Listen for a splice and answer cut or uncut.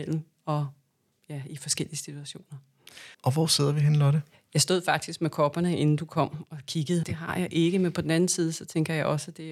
cut